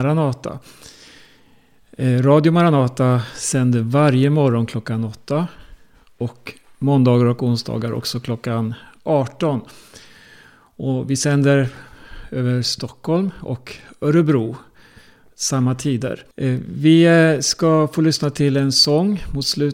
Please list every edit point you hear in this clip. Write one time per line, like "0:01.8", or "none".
0:16.3